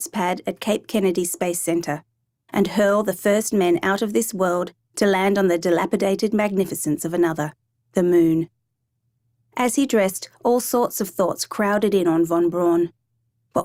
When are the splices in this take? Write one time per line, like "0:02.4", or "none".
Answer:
none